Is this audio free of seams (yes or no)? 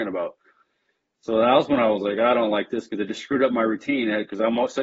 yes